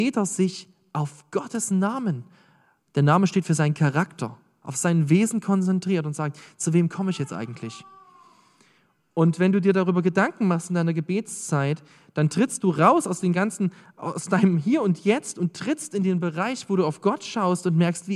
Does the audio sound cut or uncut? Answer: uncut